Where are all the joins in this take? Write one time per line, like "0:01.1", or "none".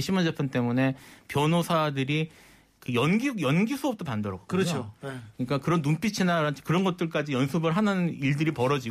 none